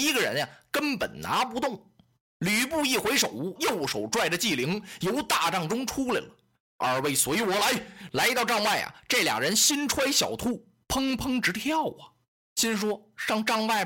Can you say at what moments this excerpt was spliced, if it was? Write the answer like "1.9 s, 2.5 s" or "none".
3.6 s